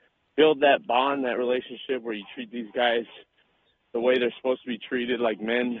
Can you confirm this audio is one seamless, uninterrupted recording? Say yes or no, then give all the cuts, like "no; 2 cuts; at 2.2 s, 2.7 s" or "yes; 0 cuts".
yes; 0 cuts